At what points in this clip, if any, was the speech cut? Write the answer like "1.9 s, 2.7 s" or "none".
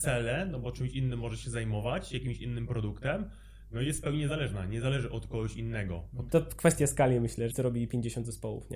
6.3 s, 7.5 s